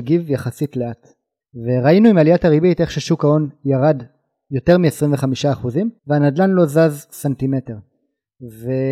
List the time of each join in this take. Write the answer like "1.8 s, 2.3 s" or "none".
1.4 s, 6.0 s